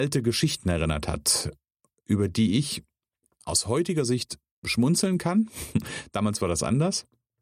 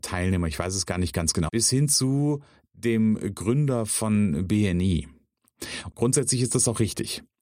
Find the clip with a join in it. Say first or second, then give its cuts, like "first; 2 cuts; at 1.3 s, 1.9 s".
second; 2 cuts; at 1.5 s, 5.9 s